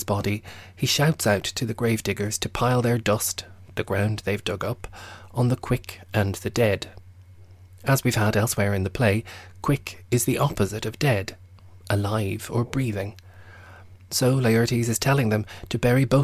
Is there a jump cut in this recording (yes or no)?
no